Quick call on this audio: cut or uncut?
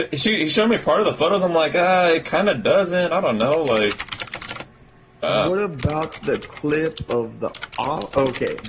uncut